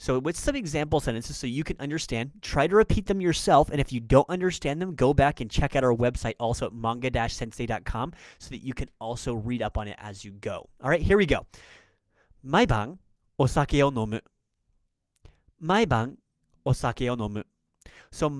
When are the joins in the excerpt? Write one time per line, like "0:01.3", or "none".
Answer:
none

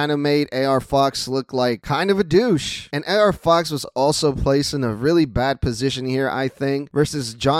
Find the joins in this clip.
none

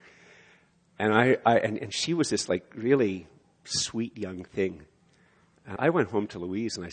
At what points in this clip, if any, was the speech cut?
0:05.8

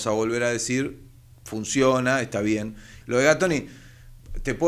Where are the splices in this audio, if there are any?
0:03.0

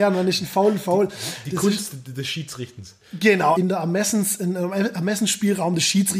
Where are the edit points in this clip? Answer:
0:03.5

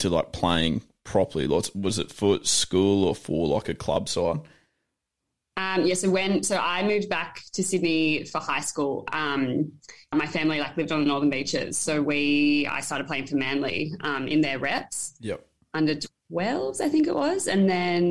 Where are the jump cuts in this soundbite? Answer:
0:10.1

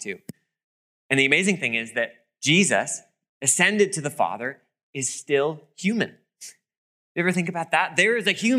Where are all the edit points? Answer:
0:01.0

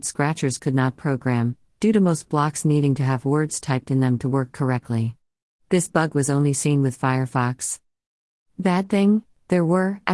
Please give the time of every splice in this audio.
none

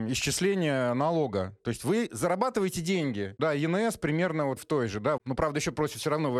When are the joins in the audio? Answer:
0:03.4
0:05.2

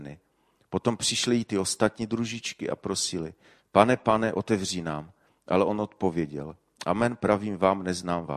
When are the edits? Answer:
none

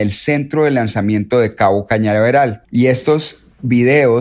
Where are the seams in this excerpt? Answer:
0:02.6

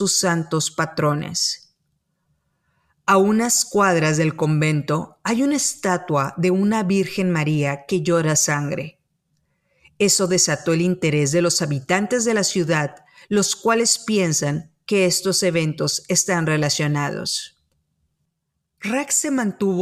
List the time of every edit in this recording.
none

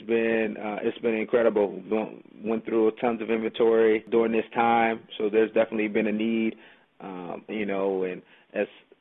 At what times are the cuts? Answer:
0:07.5

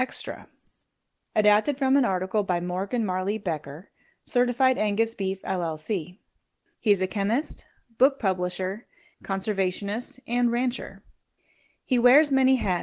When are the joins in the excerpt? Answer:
0:01.2
0:06.7
0:09.1

